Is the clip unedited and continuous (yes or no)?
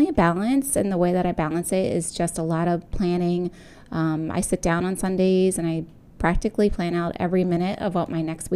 yes